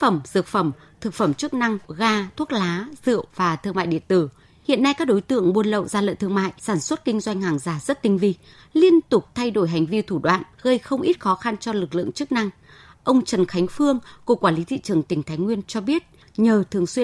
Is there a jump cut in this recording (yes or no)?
yes